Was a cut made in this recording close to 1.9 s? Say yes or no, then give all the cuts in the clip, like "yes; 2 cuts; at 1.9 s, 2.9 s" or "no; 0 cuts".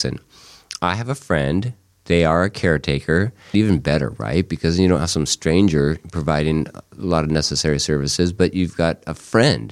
no; 1 cut; at 3.5 s